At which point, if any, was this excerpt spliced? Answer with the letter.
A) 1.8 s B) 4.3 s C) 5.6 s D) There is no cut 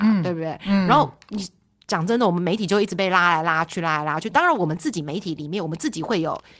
D